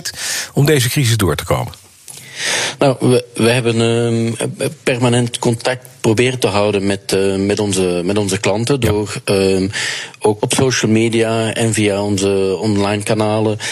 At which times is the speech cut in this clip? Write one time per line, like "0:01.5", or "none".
0:10.4